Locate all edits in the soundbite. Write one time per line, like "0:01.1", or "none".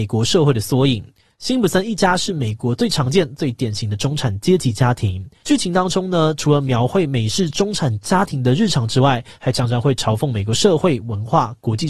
0:05.4